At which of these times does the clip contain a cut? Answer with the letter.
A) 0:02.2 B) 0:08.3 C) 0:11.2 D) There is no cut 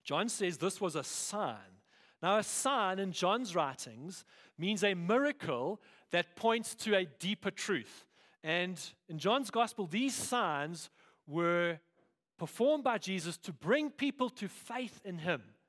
B